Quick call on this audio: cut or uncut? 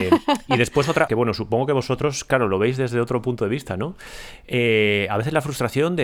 cut